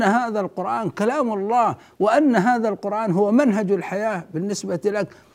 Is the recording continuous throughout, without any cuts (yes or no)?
yes